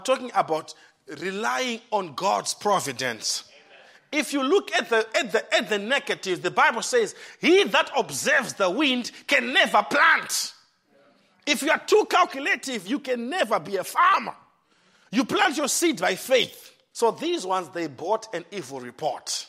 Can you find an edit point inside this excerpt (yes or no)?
yes